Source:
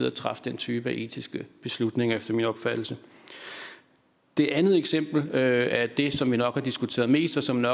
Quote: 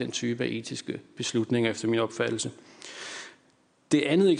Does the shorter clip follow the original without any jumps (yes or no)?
yes